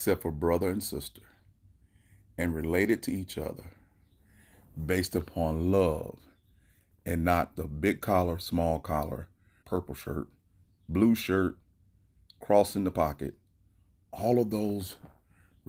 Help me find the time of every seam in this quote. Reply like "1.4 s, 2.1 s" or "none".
9.6 s